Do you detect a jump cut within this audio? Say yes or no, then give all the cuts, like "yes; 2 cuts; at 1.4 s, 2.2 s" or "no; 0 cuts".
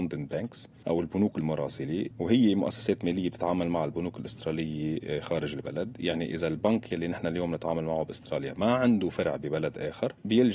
no; 0 cuts